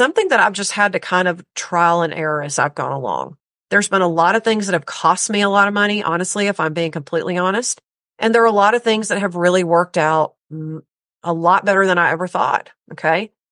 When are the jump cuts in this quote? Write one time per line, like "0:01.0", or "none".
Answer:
none